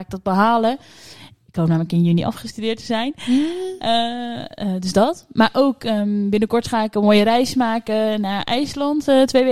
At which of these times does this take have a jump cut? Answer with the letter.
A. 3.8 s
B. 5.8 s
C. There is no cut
C